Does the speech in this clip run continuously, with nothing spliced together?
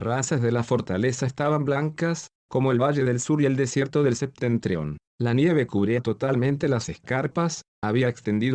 yes; 0 cuts

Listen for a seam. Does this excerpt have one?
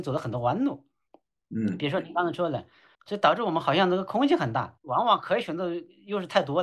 yes; 2 cuts; at 2.9 s, 4.8 s

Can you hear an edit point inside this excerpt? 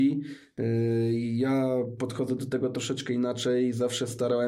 no; 0 cuts

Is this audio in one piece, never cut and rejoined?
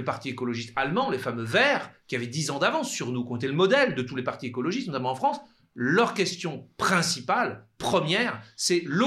yes; 0 cuts

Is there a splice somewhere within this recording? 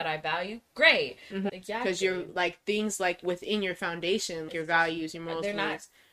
yes; 2 cuts; at 1.5 s, 4.5 s

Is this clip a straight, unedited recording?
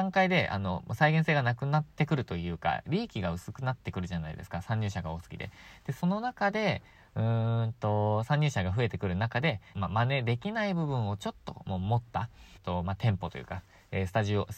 no; 3 cuts; at 5.8 s, 9.7 s, 12.6 s

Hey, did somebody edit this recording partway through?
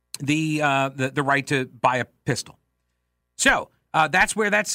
no; 0 cuts

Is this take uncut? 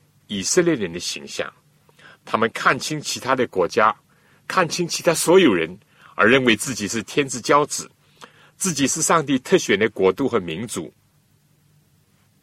yes; 0 cuts

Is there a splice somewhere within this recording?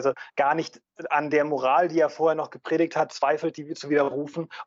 no; 0 cuts

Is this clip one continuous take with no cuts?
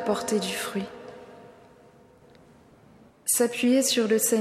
no; 1 cut; at 3.1 s

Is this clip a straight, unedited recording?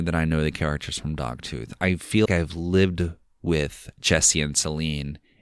no; 1 cut; at 2.3 s

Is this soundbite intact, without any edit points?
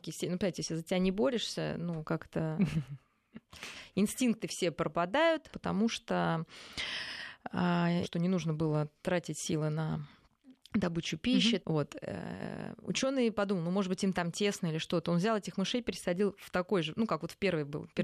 no; 3 cuts; at 5.5 s, 8.0 s, 11.6 s

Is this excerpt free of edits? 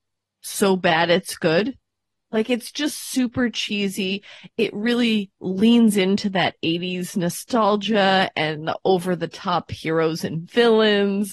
yes; 0 cuts

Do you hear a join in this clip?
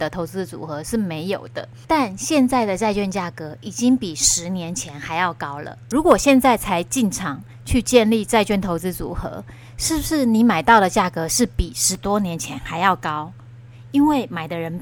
yes; 1 cut; at 1.9 s

